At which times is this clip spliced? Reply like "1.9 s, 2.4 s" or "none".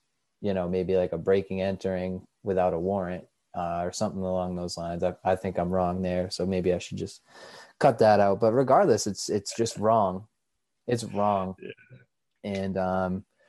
none